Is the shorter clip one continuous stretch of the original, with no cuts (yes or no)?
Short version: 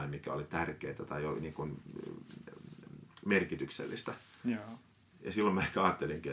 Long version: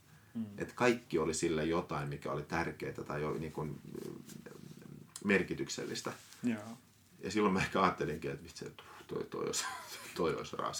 yes